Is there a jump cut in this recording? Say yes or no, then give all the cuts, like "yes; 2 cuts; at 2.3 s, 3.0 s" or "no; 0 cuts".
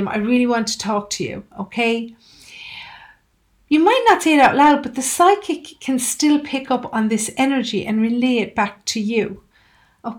no; 0 cuts